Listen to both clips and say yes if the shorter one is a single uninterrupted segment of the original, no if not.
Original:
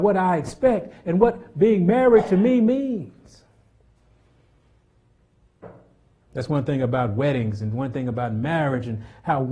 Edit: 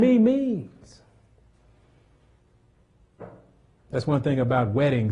yes